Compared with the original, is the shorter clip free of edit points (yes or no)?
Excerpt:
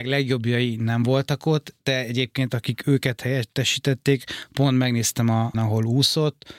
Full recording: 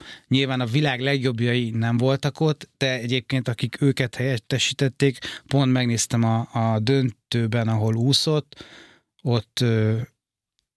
no